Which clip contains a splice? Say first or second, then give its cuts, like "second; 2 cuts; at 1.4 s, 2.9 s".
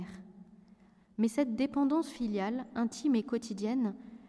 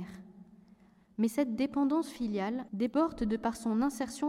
second; 1 cut; at 2.7 s